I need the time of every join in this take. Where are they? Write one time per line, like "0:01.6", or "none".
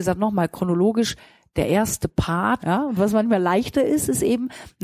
0:02.6